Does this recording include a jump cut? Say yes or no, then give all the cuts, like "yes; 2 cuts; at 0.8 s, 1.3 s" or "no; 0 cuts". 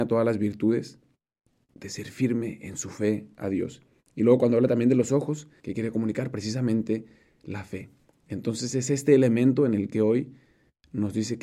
yes; 2 cuts; at 1.7 s, 5.6 s